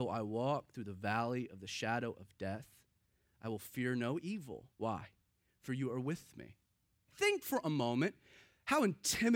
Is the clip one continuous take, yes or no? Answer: no